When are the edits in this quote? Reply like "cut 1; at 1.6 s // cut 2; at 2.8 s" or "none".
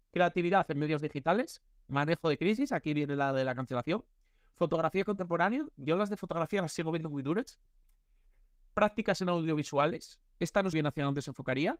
cut 1; at 10.7 s